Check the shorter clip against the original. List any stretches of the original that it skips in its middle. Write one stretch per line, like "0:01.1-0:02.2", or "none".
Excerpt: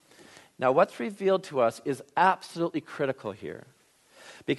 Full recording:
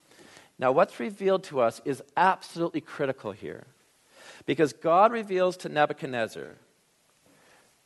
none